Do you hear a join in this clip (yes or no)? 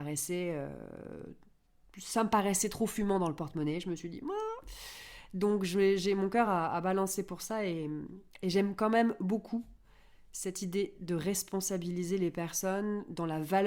no